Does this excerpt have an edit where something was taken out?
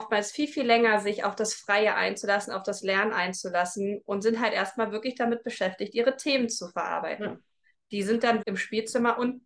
yes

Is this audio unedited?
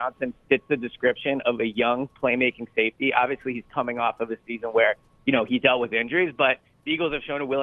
yes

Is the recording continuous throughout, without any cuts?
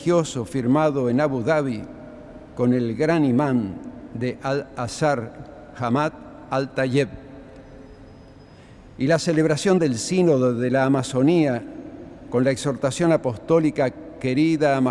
yes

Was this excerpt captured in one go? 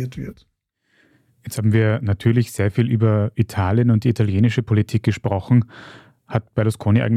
yes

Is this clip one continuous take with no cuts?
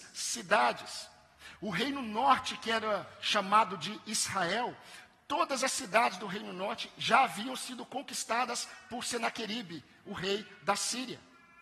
yes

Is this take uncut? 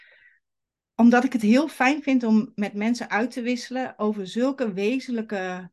yes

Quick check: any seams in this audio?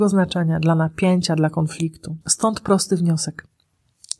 yes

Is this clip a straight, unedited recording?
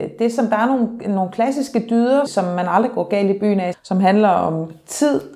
no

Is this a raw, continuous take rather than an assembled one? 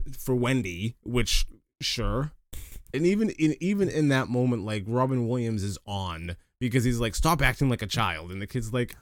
no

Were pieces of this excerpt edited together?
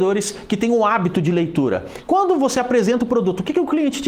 yes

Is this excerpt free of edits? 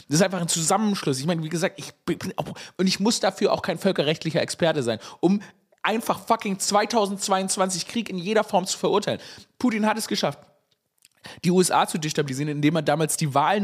yes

